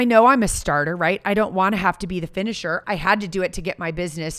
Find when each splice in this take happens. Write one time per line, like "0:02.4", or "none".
0:02.8